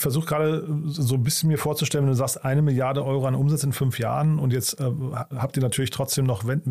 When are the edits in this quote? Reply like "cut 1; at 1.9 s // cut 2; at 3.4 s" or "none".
none